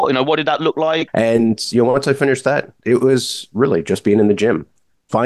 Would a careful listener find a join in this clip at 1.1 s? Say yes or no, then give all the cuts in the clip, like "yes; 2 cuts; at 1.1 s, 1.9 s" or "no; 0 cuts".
yes; 1 cut; at 1.1 s